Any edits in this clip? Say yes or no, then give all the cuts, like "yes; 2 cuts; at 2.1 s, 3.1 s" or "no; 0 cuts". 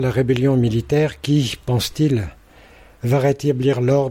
no; 0 cuts